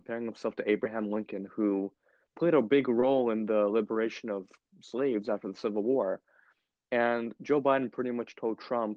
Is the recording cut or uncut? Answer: uncut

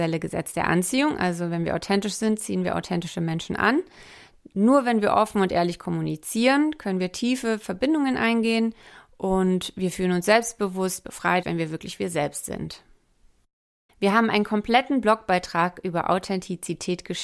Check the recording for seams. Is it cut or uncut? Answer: cut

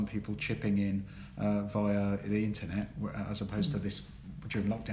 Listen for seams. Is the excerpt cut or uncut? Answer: uncut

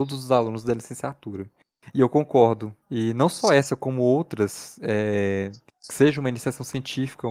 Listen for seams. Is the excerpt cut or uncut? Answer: cut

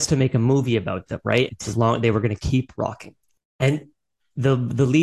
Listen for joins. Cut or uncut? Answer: cut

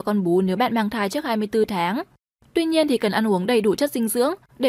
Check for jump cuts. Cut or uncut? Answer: uncut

